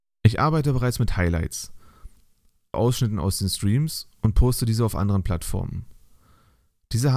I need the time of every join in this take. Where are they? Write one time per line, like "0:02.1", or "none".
0:02.7